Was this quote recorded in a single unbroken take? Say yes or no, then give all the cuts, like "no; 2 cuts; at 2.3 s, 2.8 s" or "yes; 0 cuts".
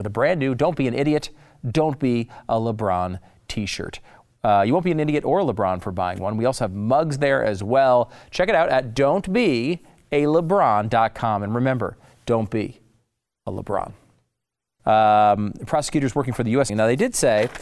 no; 2 cuts; at 14.8 s, 16.7 s